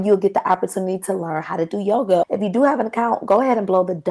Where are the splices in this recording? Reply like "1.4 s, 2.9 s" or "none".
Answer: 2.2 s